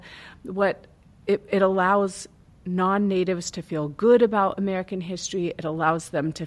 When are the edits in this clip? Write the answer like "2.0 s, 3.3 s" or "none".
none